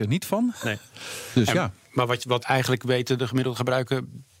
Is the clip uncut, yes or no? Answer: no